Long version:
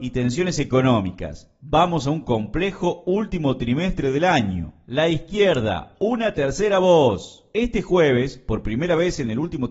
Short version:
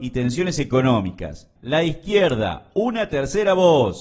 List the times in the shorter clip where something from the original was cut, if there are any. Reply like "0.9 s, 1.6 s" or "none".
1.6 s